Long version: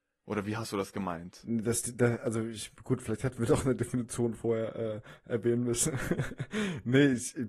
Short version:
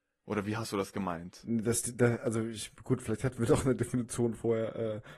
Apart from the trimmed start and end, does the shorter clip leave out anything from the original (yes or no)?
no